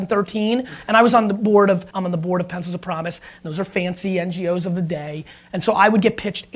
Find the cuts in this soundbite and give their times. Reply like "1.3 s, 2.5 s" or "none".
1.9 s